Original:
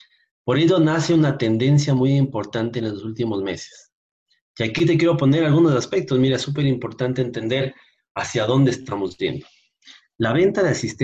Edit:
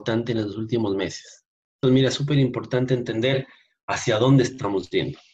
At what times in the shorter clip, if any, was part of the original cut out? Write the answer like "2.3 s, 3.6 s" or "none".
1.8 s